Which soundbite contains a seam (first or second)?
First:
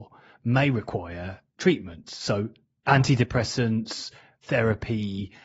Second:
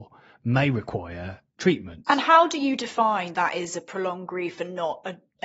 second